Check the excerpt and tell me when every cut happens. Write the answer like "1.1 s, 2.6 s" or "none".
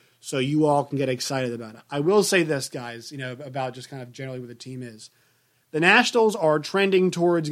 none